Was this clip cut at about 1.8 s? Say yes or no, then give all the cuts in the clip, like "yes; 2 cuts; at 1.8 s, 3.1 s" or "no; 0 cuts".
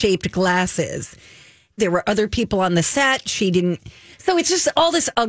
yes; 1 cut; at 1.8 s